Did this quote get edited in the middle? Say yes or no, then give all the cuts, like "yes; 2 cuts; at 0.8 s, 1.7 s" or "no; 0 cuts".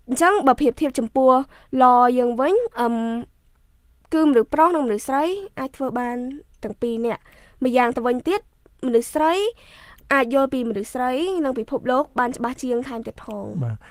yes; 1 cut; at 2.7 s